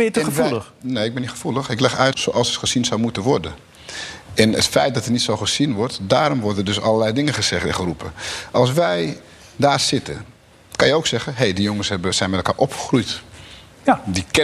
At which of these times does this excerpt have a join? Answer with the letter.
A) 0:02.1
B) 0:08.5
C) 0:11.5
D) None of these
A